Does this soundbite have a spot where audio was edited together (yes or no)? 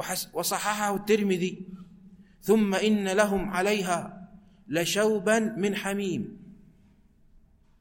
no